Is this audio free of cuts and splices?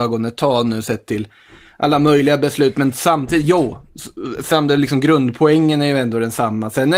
yes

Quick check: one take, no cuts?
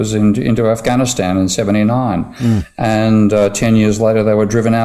yes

